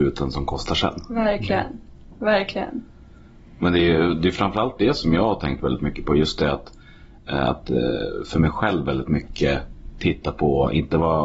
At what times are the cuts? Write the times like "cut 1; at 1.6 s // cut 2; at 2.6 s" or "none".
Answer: none

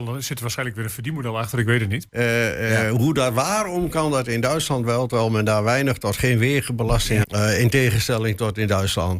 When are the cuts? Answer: cut 1; at 2.1 s // cut 2; at 7.2 s

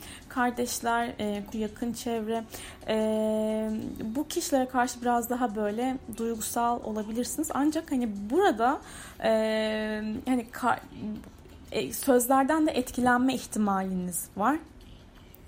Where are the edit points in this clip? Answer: cut 1; at 1.5 s

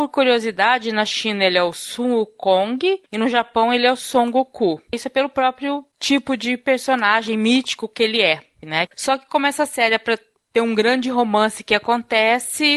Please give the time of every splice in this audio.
cut 1; at 4.9 s // cut 2; at 8.9 s

